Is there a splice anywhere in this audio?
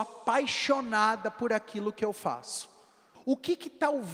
yes; 1 cut; at 3.1 s

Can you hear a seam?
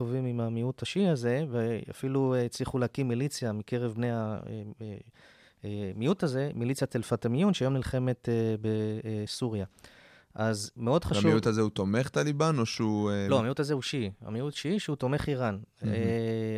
no; 0 cuts

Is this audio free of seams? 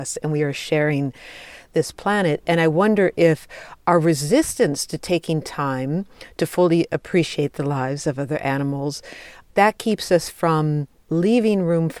yes; 0 cuts

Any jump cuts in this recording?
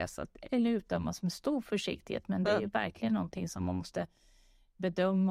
no; 0 cuts

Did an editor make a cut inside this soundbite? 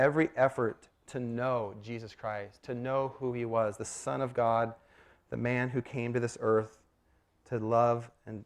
no; 0 cuts

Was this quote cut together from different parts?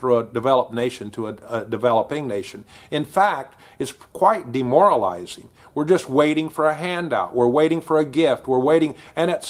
no; 0 cuts

